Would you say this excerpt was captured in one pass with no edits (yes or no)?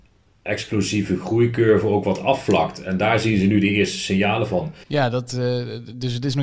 no